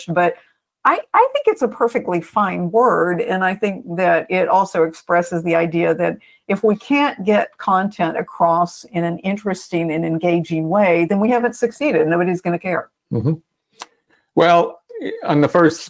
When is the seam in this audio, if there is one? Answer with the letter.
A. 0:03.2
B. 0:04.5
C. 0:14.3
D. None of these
D